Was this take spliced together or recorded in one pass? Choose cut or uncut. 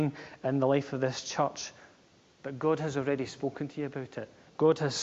uncut